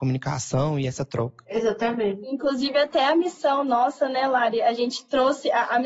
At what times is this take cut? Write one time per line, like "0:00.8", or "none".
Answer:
none